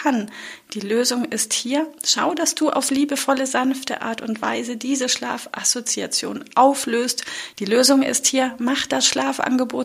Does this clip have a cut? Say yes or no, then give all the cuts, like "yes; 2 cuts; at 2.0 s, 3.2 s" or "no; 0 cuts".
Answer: yes; 1 cut; at 7.5 s